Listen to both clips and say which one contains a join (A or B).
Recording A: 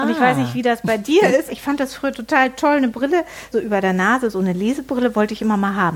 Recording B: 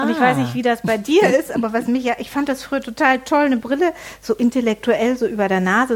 A